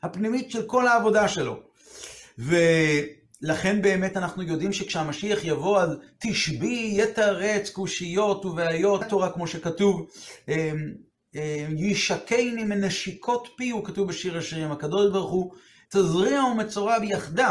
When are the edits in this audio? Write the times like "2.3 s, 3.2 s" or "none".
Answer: 9.0 s, 15.8 s